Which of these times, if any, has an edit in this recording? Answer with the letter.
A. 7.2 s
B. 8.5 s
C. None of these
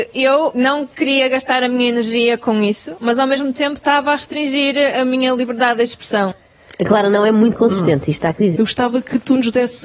B